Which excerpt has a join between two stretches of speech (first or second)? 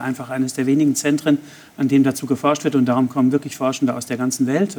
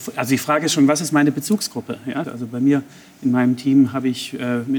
second